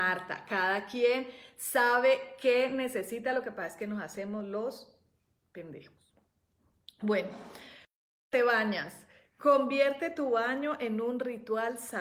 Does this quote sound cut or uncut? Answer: uncut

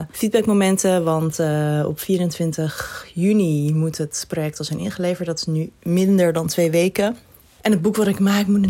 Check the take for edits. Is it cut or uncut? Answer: uncut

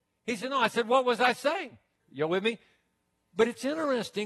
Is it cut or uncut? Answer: cut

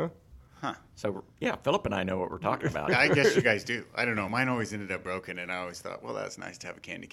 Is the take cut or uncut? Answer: uncut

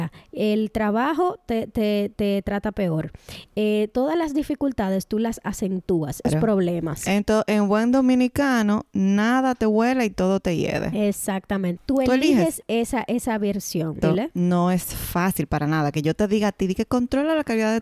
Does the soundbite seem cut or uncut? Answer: cut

